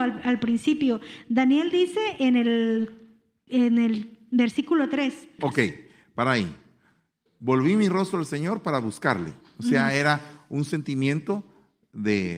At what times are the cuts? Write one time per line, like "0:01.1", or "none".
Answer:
0:05.4